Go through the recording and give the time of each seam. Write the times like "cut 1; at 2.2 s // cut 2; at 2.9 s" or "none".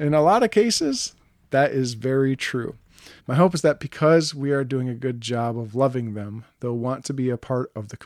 cut 1; at 3.2 s